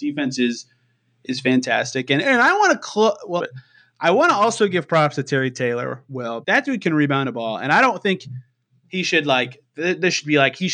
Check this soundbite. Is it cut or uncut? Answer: cut